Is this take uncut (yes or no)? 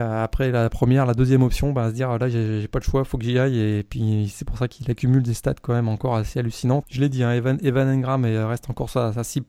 no